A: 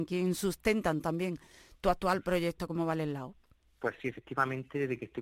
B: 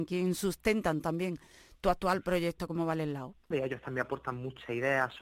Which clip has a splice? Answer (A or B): B